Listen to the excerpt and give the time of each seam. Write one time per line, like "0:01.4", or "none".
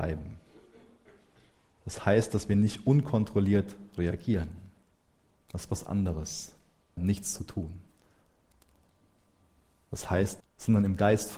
0:07.0
0:10.4